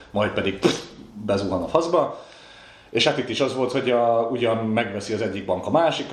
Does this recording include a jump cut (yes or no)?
no